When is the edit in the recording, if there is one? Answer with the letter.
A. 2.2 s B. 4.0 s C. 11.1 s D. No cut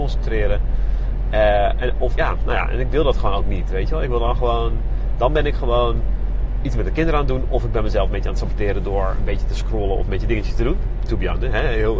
A